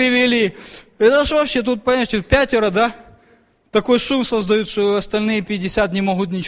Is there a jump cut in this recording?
no; 0 cuts

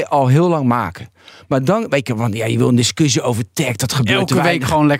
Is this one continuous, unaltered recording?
yes; 0 cuts

